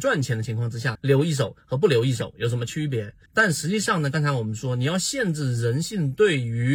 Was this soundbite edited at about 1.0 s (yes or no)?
yes